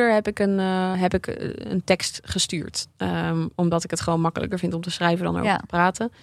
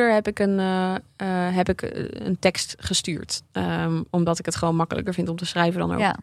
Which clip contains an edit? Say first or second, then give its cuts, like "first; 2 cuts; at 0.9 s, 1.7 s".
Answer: first; 1 cut; at 0.9 s